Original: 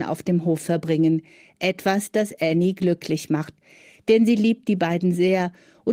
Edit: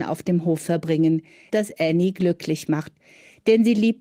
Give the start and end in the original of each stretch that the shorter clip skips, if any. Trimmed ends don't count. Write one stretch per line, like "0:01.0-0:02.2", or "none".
0:01.5-0:02.1